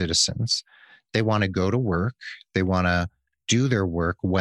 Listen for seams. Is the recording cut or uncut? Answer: uncut